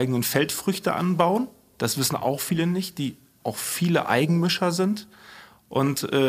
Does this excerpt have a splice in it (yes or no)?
no